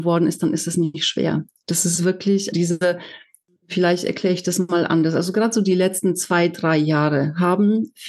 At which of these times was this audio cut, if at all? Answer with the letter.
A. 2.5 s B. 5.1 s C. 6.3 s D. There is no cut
A